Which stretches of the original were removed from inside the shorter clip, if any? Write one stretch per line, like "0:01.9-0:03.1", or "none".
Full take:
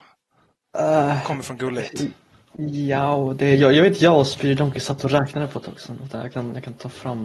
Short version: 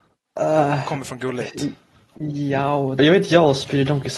0:03.4-0:03.7